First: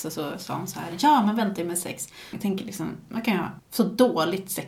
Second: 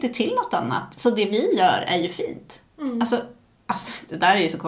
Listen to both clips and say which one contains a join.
first; 2 cuts; at 2.3 s, 3.6 s

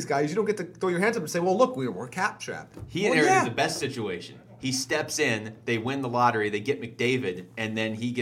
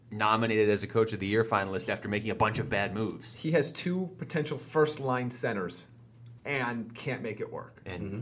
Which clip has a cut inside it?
second; 1 cut; at 6.4 s

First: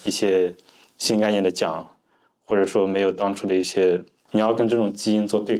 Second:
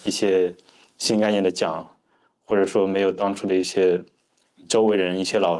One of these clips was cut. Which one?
first; 1 cut; at 4.3 s

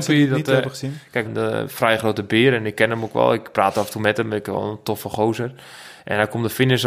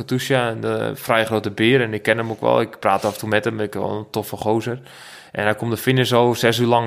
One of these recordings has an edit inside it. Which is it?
first; 1 cut; at 1.3 s

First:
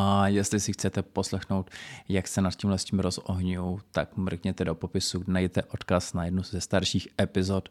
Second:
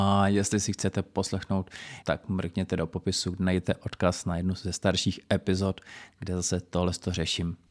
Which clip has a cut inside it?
second; 1 cut; at 2.0 s

